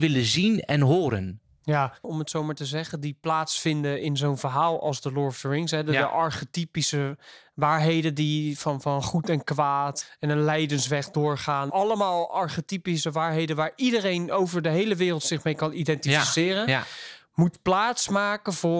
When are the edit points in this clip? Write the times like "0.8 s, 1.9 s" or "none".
2.0 s